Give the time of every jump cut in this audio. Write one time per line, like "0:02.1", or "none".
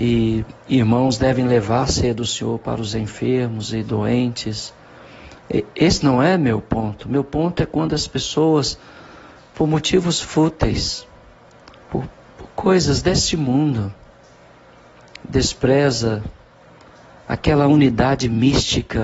none